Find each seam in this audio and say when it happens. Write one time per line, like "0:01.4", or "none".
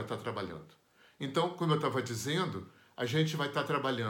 none